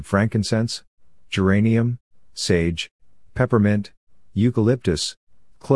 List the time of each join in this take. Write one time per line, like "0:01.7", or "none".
none